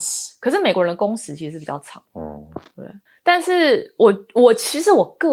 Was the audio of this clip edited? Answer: no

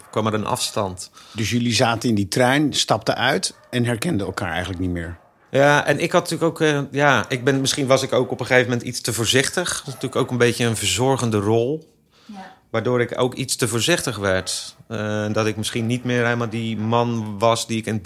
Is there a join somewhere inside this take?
no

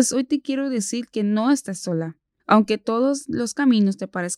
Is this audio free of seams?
no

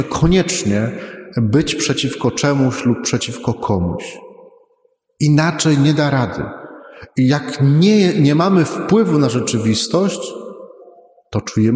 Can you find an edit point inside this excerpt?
no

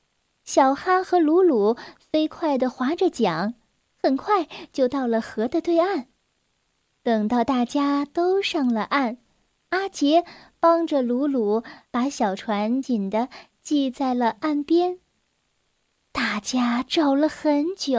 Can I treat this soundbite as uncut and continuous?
no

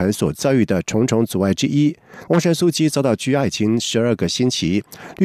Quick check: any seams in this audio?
yes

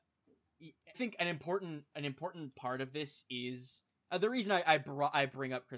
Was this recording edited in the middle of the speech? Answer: yes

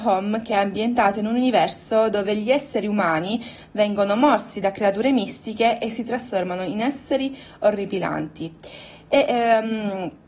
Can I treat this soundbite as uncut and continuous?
yes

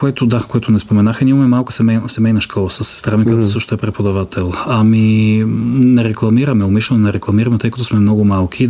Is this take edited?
no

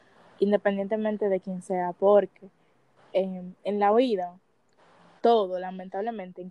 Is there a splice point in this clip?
no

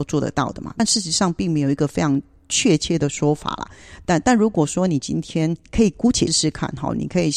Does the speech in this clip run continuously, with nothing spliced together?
no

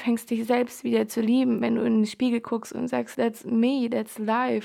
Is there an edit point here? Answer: yes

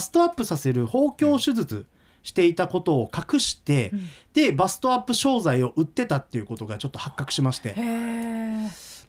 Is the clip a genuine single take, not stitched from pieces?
yes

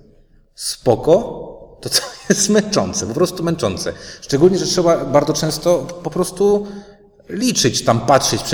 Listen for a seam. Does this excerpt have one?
no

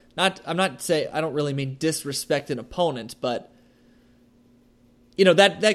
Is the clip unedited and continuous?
yes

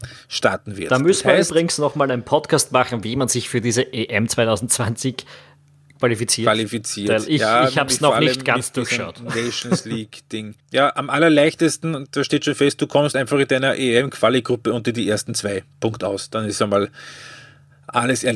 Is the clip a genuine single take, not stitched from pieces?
yes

